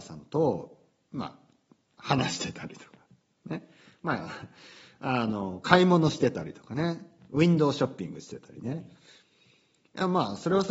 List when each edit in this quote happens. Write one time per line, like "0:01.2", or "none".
none